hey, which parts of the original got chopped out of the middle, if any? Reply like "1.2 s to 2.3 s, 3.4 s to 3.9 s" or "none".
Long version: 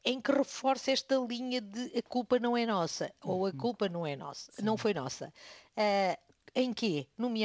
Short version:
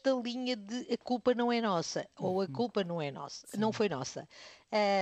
none